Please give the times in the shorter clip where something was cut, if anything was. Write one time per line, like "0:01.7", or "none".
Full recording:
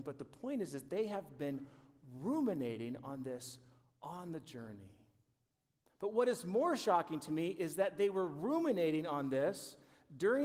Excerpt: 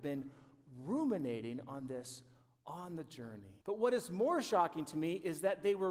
0:03.6